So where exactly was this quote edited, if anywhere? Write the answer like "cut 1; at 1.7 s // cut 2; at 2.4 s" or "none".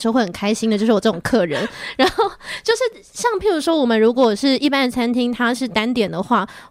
none